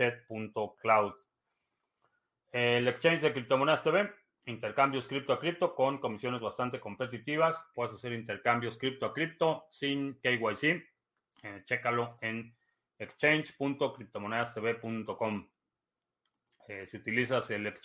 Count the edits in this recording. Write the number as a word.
one